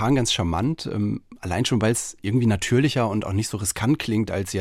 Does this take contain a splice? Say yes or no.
no